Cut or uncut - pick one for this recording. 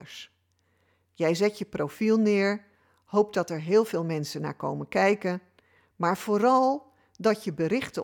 uncut